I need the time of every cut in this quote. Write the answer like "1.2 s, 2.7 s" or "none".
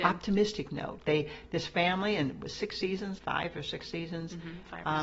3.2 s